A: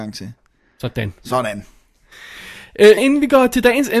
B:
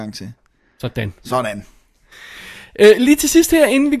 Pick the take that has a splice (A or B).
A